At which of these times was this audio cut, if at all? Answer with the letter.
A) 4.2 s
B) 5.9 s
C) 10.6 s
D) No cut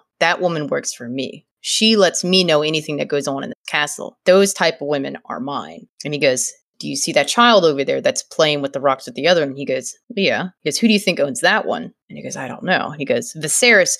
D